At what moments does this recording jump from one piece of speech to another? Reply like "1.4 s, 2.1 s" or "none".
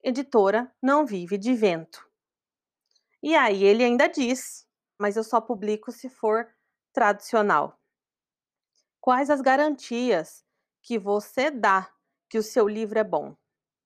5.0 s